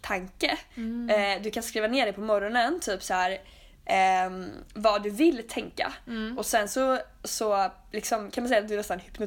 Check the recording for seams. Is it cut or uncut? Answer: uncut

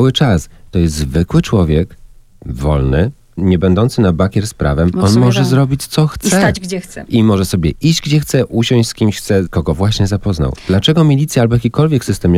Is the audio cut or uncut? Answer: cut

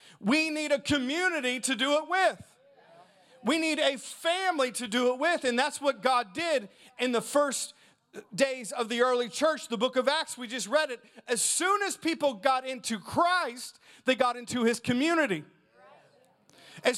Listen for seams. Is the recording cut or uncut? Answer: uncut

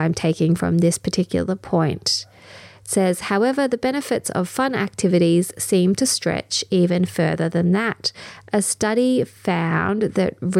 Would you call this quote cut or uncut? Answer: uncut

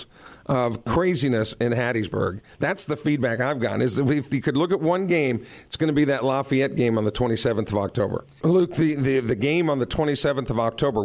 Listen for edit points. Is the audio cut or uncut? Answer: cut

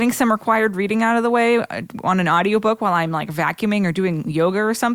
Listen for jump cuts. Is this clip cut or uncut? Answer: uncut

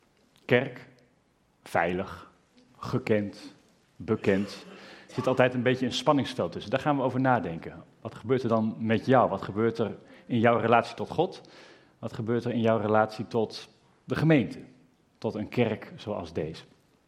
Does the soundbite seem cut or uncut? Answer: uncut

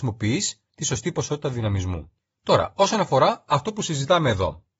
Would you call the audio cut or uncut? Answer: uncut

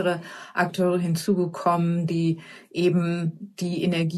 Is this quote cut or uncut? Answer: uncut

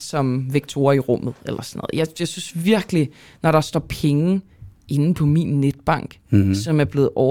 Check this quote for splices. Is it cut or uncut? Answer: uncut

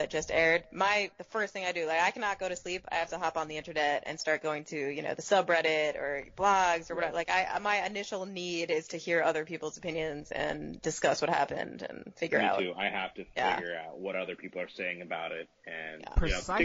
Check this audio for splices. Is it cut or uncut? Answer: uncut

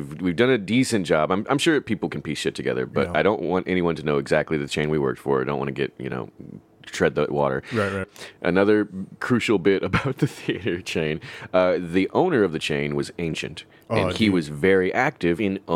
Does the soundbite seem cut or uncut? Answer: cut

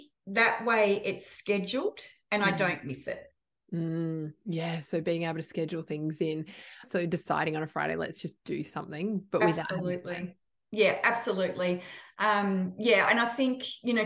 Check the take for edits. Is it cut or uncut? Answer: cut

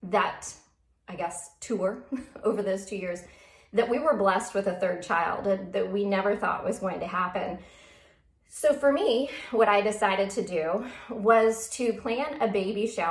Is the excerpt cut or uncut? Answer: uncut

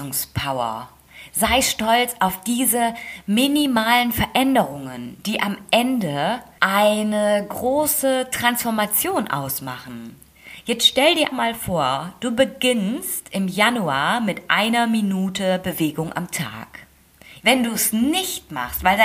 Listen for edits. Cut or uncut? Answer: cut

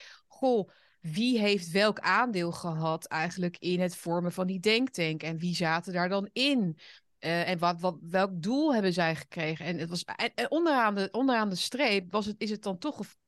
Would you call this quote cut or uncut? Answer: cut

